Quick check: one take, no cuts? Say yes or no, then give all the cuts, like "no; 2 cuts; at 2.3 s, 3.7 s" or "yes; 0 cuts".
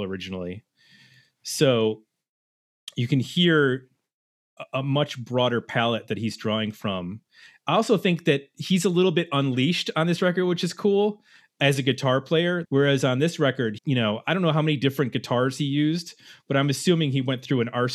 no; 2 cuts; at 12.6 s, 13.8 s